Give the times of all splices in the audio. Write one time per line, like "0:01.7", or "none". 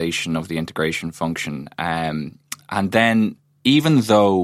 none